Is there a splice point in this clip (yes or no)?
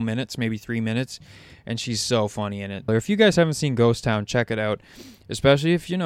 yes